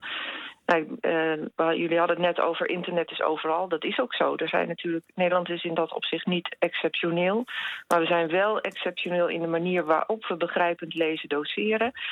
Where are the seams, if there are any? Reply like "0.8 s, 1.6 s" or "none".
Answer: none